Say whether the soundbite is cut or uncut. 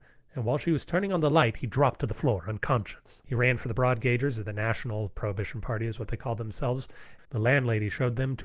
cut